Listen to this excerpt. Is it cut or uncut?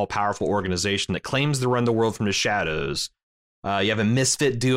cut